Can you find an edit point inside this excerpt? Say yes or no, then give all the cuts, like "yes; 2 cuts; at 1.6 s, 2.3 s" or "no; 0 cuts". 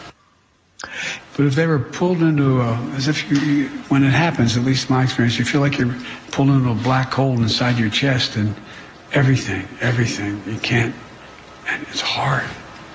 yes; 1 cut; at 1.2 s